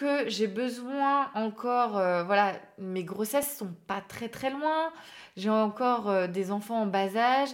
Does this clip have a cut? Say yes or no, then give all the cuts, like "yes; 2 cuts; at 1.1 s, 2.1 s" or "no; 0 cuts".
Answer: no; 0 cuts